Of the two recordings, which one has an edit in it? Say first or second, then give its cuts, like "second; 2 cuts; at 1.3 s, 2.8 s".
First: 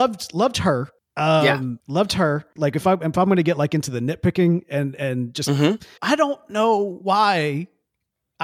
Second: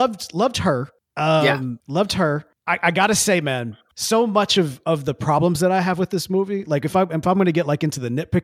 first; 2 cuts; at 2.6 s, 6.0 s